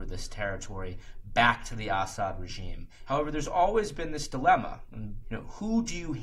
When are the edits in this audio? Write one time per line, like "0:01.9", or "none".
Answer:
0:03.1
0:05.2